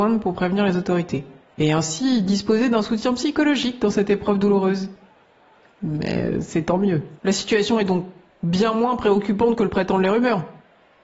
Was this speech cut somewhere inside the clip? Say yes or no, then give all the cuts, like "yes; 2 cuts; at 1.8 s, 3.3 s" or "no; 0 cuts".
yes; 2 cuts; at 5.8 s, 7.2 s